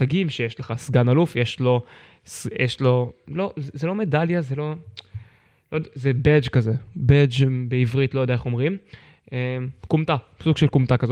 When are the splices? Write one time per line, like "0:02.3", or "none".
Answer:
none